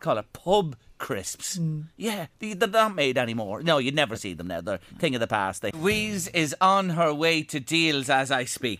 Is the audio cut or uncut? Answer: cut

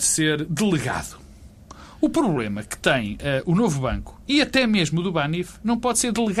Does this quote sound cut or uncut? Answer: uncut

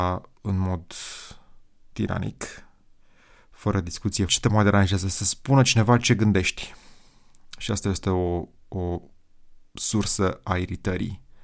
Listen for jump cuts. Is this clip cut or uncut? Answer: cut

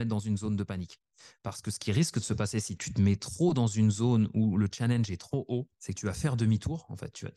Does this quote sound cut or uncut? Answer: cut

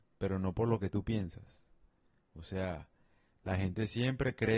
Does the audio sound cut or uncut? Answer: cut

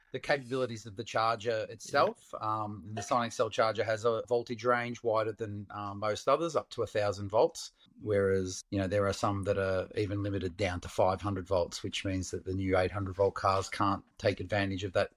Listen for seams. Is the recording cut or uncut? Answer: cut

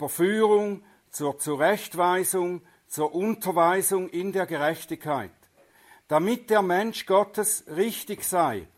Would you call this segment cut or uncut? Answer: uncut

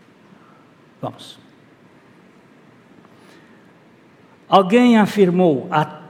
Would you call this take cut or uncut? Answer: uncut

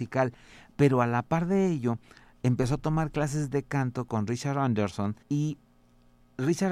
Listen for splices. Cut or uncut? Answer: cut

